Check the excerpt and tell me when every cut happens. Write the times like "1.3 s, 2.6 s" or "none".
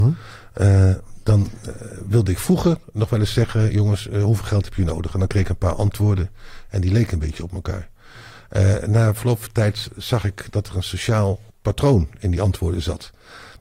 11.5 s